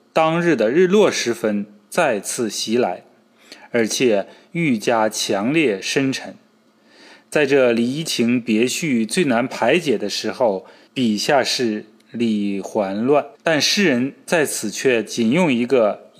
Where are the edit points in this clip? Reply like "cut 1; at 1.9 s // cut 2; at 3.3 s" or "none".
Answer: cut 1; at 10.9 s // cut 2; at 13.3 s